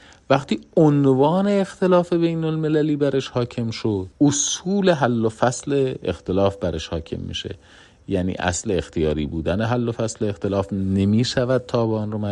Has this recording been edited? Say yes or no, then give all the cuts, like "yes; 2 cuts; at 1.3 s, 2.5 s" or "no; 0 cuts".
yes; 1 cut; at 4.1 s